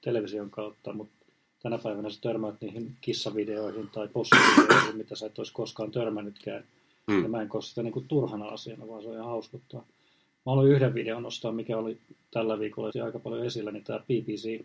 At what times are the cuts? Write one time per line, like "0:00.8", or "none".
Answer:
0:12.9